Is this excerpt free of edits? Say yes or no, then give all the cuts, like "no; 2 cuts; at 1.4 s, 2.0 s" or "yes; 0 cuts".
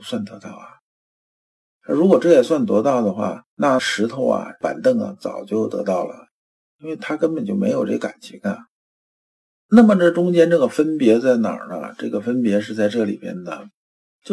yes; 0 cuts